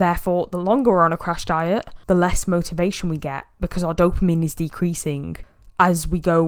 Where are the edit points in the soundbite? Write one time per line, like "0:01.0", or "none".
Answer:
0:02.0